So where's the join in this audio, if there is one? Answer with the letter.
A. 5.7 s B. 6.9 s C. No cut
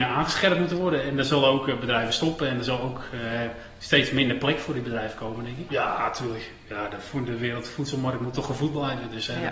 A